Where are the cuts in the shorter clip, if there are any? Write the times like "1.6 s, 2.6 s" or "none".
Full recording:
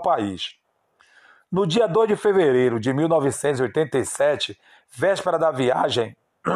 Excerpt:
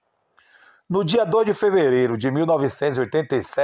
none